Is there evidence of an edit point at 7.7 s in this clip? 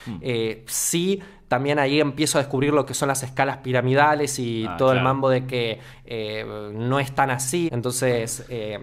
yes; 1 cut; at 7.7 s

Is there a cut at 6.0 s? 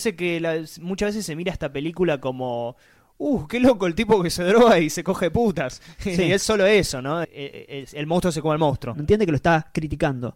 no; 2 cuts; at 7.2 s, 8.9 s

